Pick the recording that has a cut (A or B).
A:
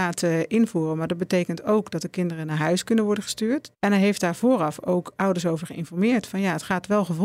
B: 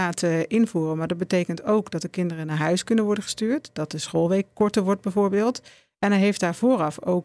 A